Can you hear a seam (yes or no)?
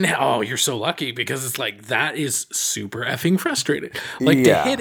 no